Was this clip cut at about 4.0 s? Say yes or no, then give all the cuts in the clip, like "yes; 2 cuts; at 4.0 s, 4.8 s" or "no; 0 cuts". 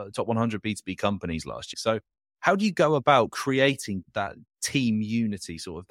yes; 2 cuts; at 1.7 s, 4.0 s